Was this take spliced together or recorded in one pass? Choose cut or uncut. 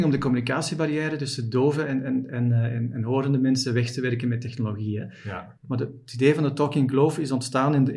cut